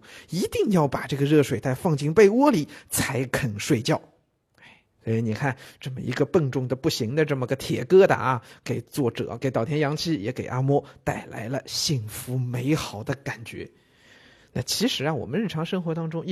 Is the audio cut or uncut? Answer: uncut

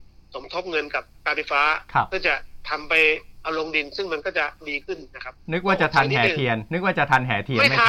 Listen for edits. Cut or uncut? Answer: uncut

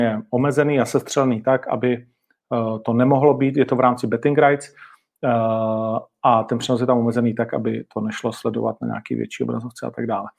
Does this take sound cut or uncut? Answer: uncut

